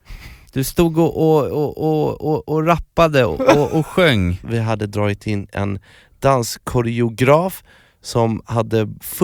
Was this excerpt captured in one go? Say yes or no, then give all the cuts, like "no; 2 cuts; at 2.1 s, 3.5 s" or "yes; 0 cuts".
no; 1 cut; at 4.4 s